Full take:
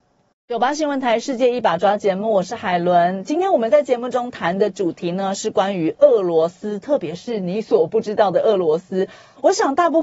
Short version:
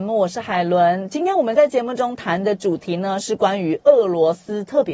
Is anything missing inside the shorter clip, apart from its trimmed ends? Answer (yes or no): no